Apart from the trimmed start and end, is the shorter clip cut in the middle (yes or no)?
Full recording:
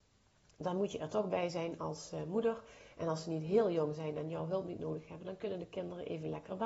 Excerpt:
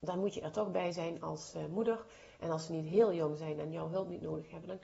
no